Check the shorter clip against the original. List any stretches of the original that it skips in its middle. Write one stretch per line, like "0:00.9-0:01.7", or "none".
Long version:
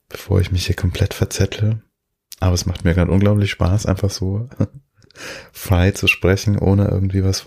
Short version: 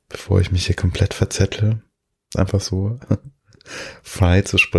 0:02.3-0:03.8